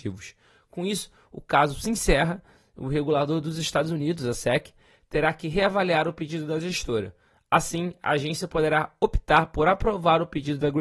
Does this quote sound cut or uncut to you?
uncut